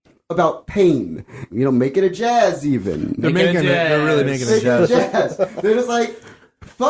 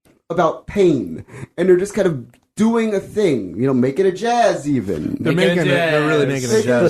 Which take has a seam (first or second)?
first